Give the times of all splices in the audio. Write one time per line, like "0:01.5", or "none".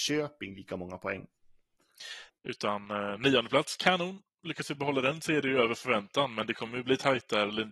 0:02.3